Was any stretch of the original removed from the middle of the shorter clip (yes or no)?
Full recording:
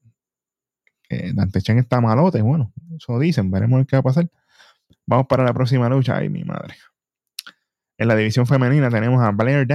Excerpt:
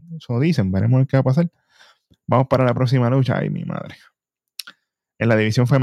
no